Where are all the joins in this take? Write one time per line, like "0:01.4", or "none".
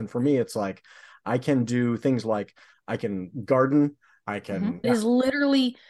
0:04.8